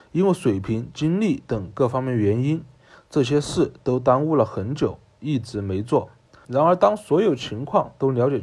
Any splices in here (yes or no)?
yes